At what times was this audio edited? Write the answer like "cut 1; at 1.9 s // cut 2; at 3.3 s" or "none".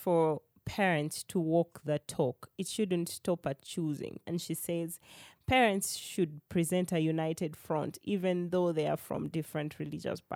cut 1; at 4.3 s